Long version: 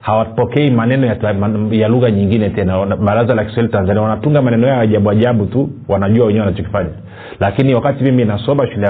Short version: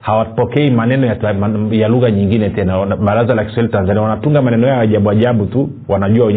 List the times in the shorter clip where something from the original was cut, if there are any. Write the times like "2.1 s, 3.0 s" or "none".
none